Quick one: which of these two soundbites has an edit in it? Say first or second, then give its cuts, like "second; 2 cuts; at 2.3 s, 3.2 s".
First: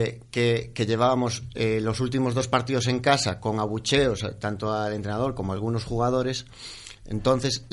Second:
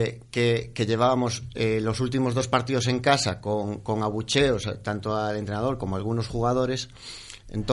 first; 1 cut; at 3.4 s